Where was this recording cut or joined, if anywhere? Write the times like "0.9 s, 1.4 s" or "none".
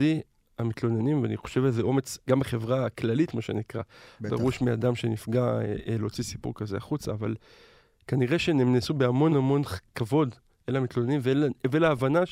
2.2 s, 9.3 s